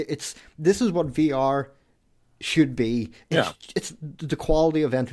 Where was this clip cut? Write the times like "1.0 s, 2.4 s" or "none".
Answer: 3.2 s